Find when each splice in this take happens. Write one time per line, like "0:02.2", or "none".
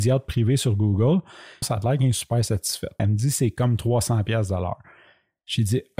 0:01.6
0:03.0